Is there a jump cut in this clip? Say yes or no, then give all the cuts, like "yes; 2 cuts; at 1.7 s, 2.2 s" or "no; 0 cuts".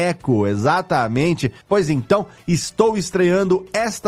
yes; 1 cut; at 1.6 s